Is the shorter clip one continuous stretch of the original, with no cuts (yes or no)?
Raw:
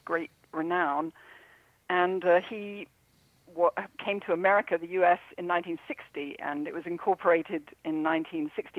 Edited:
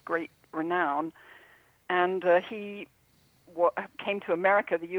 yes